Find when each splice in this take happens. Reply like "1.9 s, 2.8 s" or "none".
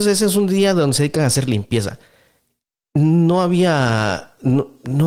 none